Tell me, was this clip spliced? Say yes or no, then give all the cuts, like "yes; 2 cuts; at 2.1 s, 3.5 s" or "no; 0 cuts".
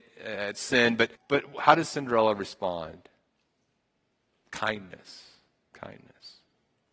yes; 1 cut; at 1.2 s